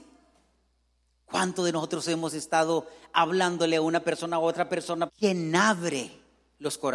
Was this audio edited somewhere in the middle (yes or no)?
yes